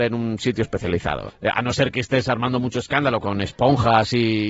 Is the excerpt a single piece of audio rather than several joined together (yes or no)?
no